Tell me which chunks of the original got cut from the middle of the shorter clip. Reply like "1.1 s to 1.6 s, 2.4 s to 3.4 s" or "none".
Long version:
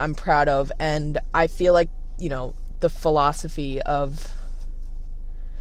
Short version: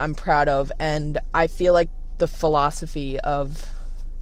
2.1 s to 2.7 s

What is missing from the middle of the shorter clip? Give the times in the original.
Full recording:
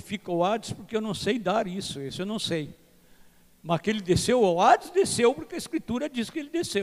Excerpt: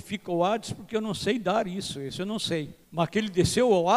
2.8 s to 3.6 s

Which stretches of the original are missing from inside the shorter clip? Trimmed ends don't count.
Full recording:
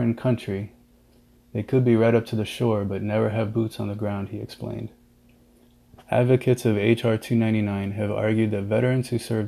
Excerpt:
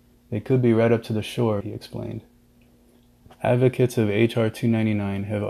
2.8 s to 4.3 s

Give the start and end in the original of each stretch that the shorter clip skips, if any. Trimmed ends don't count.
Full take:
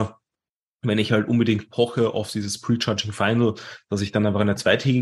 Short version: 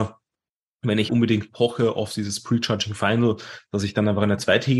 1.1 s to 1.3 s

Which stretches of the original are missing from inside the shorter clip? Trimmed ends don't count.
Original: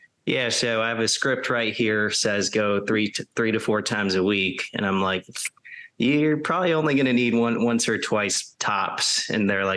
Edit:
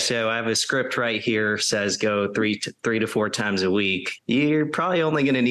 4.7 s to 5.9 s

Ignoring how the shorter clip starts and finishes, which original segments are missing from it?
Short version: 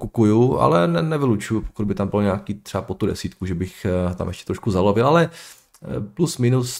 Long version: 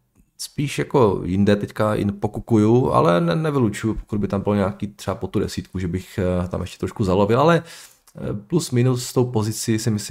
none

